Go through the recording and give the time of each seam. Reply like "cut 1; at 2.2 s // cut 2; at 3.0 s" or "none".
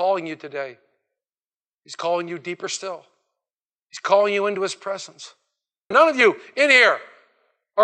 cut 1; at 5.9 s